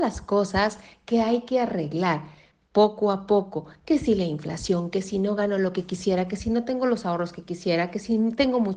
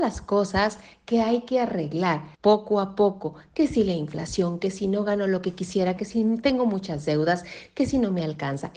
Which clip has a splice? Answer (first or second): second